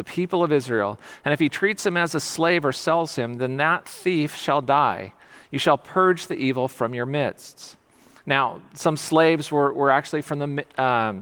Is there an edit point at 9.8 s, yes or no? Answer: no